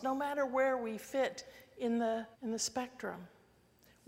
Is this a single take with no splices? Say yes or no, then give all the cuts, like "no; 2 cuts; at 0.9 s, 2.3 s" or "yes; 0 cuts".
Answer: no; 1 cut; at 2.3 s